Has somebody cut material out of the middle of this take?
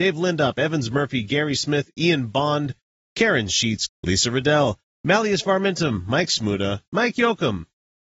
yes; 1 cut; at 3.9 s

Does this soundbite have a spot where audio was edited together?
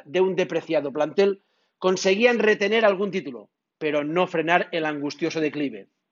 no; 0 cuts

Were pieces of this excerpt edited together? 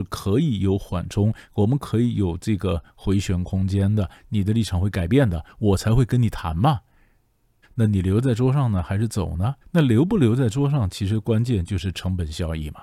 yes; 2 cuts; at 7.6 s, 9.6 s

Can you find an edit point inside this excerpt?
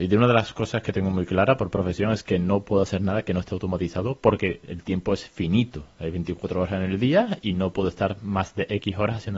no; 0 cuts

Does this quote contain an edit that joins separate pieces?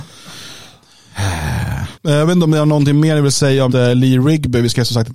yes; 2 cuts; at 1.9 s, 3.7 s

